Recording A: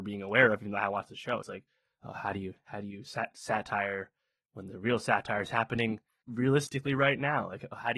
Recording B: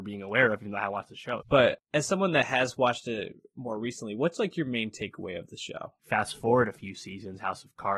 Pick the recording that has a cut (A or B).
B